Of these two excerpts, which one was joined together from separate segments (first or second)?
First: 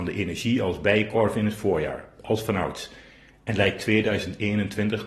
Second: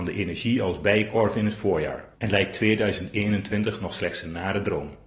second